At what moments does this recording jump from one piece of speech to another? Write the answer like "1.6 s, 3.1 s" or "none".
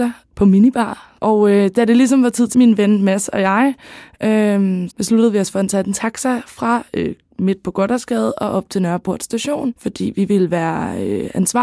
2.5 s, 4.9 s